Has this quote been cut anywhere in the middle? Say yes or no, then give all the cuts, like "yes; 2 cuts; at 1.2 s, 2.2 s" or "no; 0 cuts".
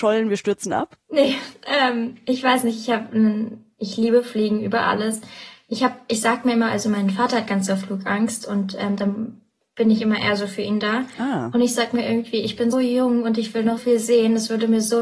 yes; 2 cuts; at 12.7 s, 13.8 s